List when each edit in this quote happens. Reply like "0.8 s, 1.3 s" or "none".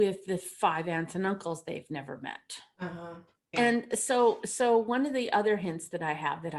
3.5 s